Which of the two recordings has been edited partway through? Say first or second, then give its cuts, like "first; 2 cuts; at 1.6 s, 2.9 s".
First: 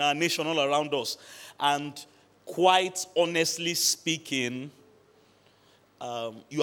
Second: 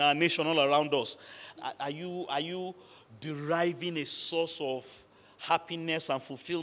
second; 1 cut; at 1.6 s